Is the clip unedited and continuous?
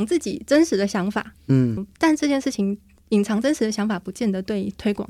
no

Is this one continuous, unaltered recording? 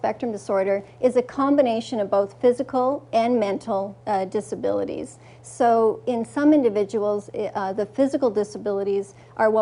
yes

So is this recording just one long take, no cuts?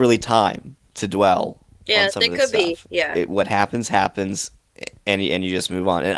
yes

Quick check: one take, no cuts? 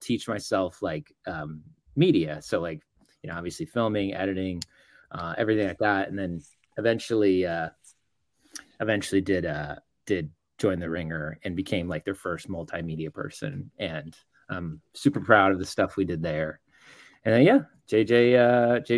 yes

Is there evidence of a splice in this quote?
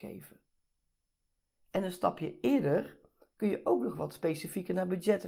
no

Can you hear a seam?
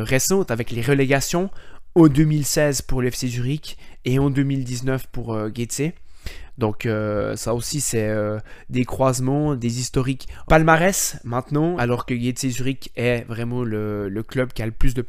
yes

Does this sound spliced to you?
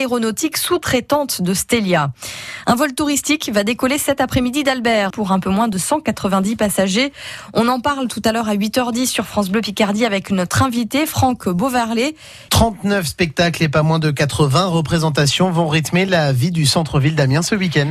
yes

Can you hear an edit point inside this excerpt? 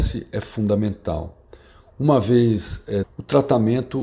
yes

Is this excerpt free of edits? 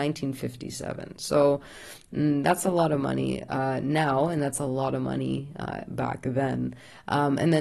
yes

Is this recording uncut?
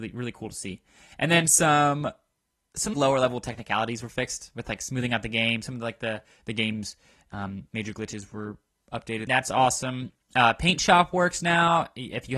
no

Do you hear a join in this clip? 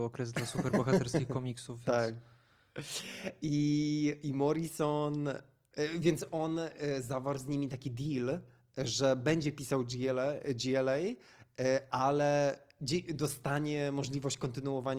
no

